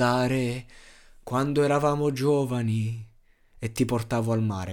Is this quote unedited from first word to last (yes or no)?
yes